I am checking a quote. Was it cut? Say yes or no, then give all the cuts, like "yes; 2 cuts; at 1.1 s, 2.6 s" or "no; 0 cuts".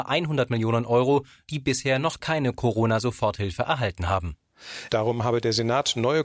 yes; 2 cuts; at 1.5 s, 4.9 s